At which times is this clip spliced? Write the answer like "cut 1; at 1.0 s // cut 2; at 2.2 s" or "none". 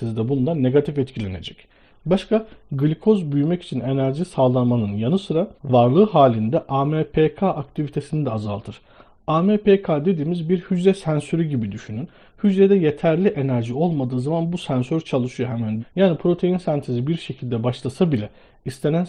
cut 1; at 5.6 s // cut 2; at 15.8 s